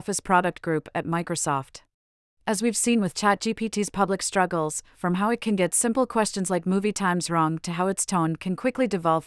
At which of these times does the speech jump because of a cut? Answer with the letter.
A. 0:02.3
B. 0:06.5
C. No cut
A